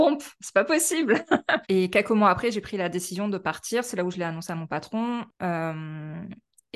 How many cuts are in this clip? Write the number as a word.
two